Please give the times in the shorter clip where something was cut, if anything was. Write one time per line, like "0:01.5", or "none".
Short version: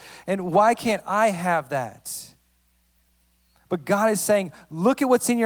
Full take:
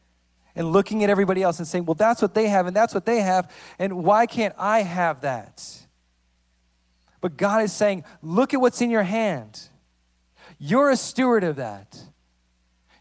none